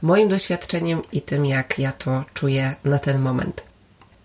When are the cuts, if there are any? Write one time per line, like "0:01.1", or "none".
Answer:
0:01.1